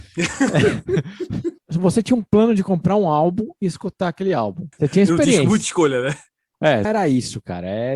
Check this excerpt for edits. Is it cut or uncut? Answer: cut